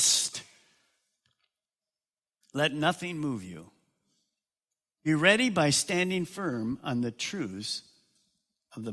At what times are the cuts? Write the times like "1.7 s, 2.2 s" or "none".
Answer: 2.4 s